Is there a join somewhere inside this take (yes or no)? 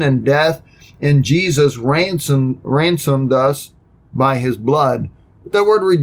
no